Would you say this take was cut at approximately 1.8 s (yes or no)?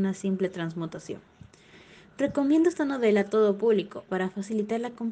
no